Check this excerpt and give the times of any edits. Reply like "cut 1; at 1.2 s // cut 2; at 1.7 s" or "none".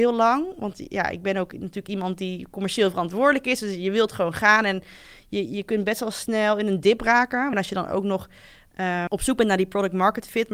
cut 1; at 7.5 s // cut 2; at 9.1 s